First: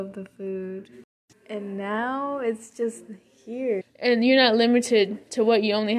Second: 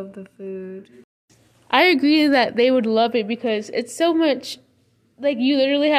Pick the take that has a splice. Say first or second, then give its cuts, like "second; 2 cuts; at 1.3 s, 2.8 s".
first; 2 cuts; at 1.3 s, 3.8 s